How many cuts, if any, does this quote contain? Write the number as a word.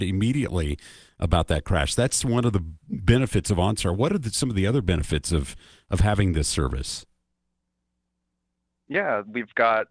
zero